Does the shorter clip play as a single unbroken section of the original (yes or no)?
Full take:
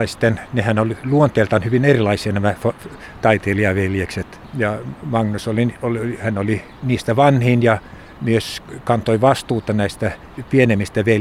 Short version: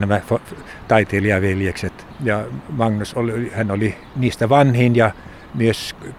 no